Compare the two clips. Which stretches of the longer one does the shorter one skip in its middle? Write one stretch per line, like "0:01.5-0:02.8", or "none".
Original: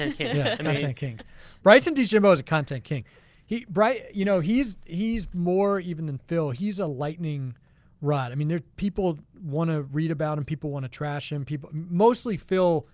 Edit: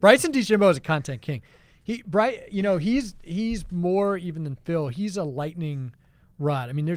none